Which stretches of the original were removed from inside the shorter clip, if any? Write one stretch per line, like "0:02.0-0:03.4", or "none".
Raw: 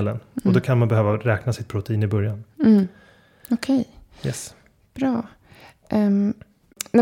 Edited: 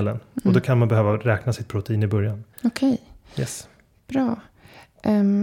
0:02.5-0:03.4